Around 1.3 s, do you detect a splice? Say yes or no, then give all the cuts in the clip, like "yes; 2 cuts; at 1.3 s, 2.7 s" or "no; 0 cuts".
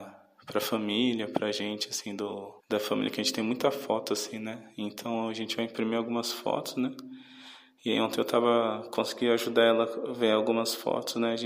no; 1 cut; at 2.6 s